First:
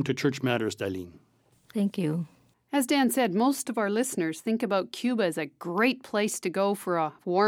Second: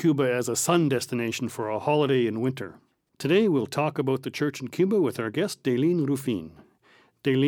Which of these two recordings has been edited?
second; 1 cut; at 3.1 s

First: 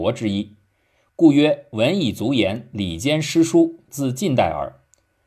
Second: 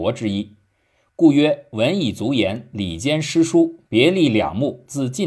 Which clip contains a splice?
first; 1 cut; at 3.9 s

